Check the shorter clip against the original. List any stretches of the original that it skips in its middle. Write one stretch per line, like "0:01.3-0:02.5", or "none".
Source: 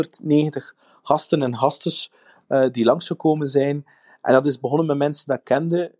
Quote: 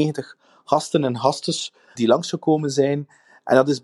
0:02.3-0:02.7